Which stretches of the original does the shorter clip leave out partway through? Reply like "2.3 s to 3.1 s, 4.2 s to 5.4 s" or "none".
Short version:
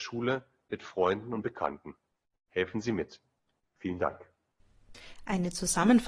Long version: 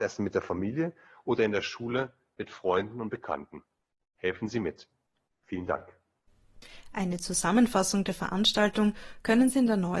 none